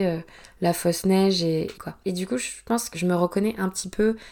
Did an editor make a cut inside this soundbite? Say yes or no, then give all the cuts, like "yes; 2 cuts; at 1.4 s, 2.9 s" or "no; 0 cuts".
yes; 2 cuts; at 1.8 s, 2.9 s